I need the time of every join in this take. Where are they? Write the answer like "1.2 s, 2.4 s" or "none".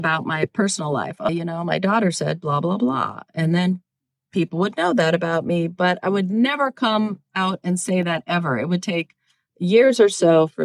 1.3 s

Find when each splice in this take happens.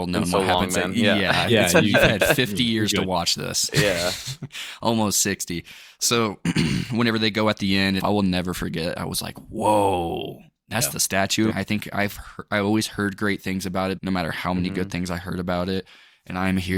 8.0 s, 11.5 s, 14.0 s

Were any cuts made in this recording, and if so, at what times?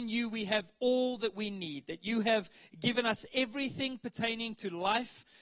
none

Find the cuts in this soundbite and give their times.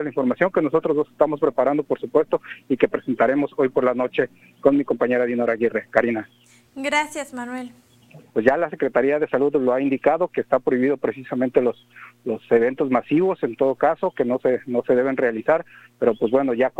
8.3 s

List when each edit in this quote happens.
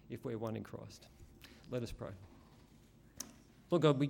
1.6 s

